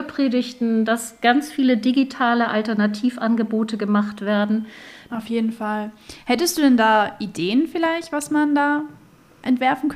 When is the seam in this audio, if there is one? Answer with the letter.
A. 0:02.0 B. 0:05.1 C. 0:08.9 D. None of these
B